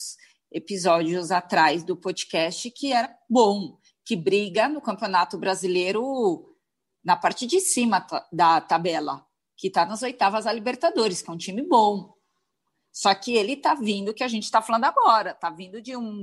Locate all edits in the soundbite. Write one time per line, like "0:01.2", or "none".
none